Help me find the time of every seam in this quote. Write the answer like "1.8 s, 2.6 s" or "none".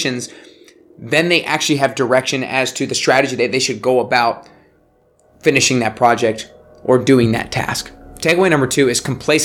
none